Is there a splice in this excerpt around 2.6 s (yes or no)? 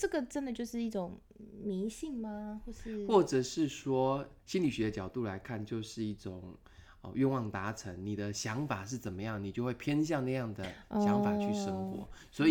no